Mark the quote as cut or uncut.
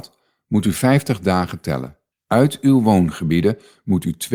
cut